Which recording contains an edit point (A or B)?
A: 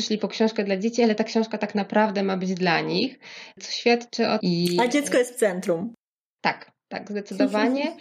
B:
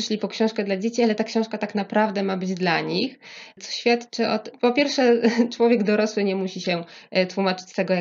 A